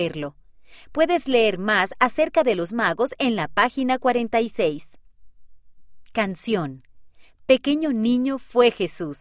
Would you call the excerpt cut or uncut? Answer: uncut